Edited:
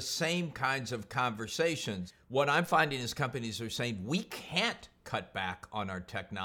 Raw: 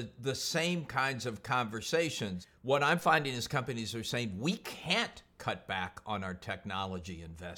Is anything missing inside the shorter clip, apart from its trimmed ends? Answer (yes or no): no